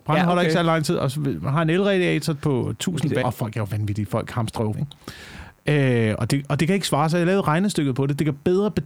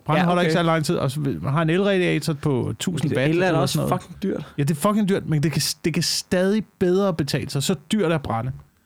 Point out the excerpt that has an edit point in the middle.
first; 2 cuts; at 3.2 s, 4.7 s

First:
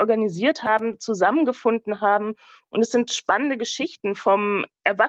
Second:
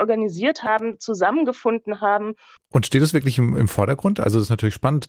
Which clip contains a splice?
second; 1 cut; at 2.6 s

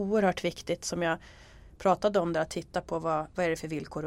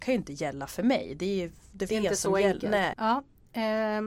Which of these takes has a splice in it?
second; 2 cuts; at 1.9 s, 2.9 s

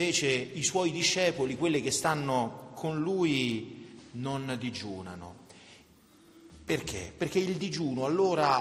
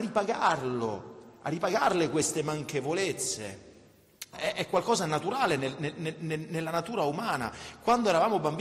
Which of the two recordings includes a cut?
second; 1 cut; at 4.3 s

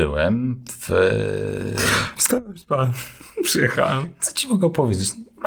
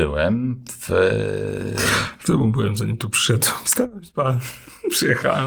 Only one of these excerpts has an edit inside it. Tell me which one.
first; 1 cut; at 2.2 s

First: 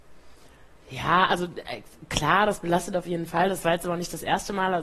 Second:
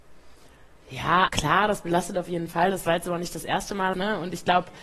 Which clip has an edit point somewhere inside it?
second; 2 cuts; at 1.3 s, 3.9 s

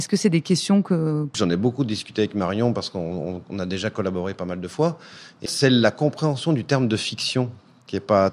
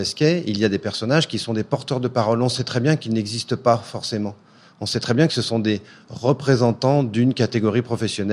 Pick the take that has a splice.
first; 2 cuts; at 1.3 s, 5.5 s

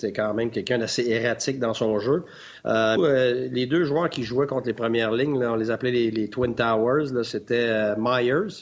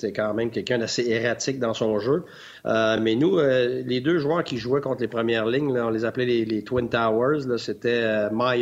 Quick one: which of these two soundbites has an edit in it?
first; 1 cut; at 3.0 s

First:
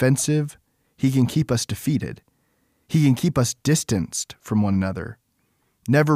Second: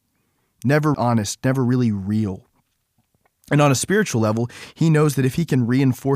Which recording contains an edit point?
second; 1 cut; at 0.9 s

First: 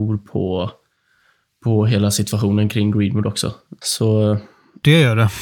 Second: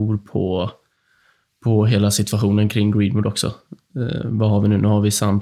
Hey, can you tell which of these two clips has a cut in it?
first; 1 cut; at 3.8 s

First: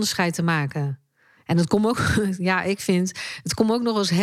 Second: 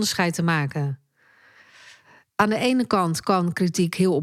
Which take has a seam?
first; 1 cut; at 1.4 s

